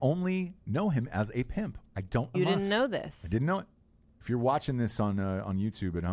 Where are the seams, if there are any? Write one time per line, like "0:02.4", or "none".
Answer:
0:02.3
0:04.2